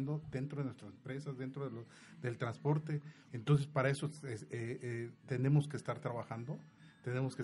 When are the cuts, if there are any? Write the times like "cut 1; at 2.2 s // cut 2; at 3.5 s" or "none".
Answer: cut 1; at 3.3 s